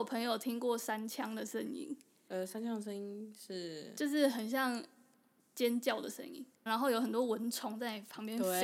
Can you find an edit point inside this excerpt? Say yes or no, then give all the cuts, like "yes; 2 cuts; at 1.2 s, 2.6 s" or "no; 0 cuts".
yes; 1 cut; at 6.7 s